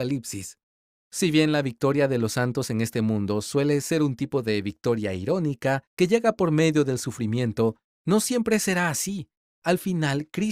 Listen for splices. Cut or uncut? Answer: uncut